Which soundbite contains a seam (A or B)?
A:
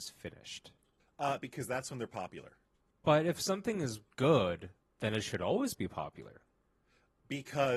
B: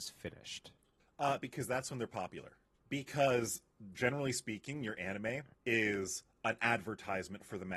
B